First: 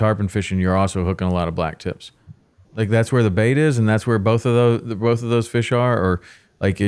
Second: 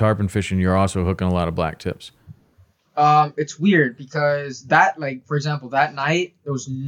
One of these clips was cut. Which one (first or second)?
first